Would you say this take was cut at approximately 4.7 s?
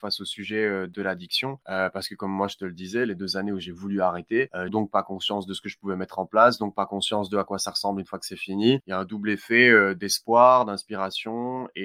yes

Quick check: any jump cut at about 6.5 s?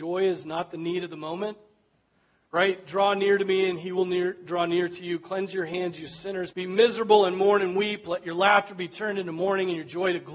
yes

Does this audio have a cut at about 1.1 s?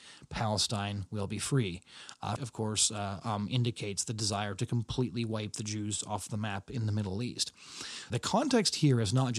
no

